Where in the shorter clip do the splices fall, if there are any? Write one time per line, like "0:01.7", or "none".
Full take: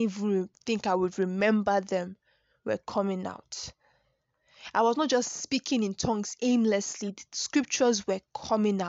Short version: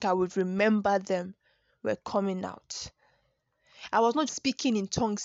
0:04.3